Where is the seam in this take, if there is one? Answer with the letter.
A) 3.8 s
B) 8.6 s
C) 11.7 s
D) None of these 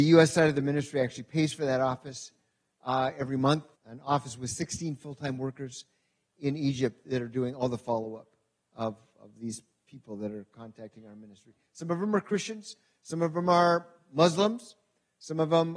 A